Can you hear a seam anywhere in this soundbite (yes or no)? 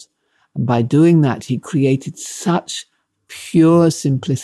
no